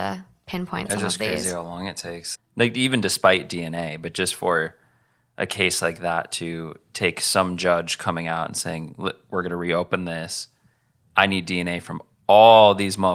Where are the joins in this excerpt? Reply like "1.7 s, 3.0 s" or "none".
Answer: 2.3 s